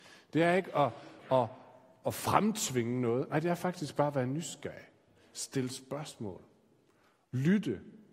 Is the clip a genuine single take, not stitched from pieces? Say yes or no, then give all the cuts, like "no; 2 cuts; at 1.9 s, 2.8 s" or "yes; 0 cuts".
yes; 0 cuts